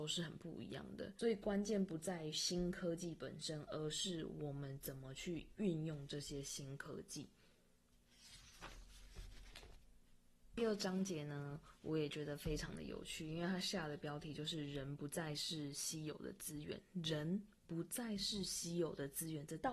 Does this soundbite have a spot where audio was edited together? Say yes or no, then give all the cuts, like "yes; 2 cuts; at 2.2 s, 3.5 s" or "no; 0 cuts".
no; 0 cuts